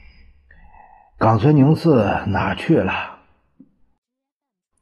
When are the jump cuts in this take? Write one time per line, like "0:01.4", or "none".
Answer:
none